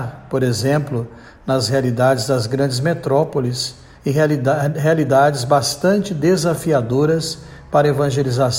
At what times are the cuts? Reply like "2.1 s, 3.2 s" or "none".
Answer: 4.0 s